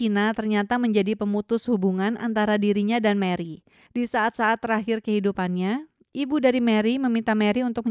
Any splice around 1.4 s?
no; 1 cut; at 3.9 s

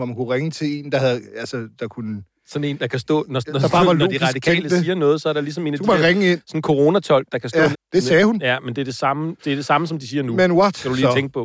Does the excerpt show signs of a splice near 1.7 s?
no; 2 cuts; at 7.7 s, 9.4 s

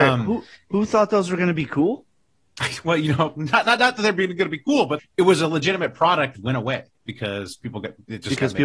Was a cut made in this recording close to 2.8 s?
no; 2 cuts; at 5.0 s, 6.3 s

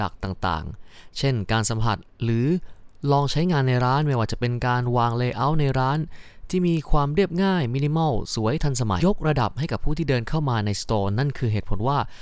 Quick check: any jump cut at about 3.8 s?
no; 1 cut; at 9.0 s

